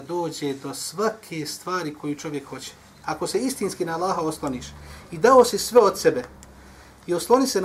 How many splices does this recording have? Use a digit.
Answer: 1